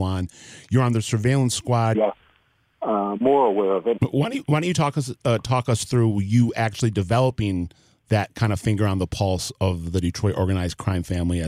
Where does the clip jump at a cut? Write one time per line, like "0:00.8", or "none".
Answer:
0:01.9
0:04.0